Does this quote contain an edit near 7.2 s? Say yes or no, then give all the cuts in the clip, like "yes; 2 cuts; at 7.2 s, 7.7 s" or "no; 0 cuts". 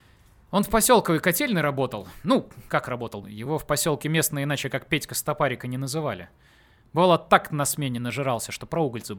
no; 1 cut; at 3.2 s